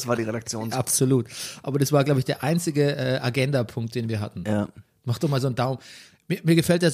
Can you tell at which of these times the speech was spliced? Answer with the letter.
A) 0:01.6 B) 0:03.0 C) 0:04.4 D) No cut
D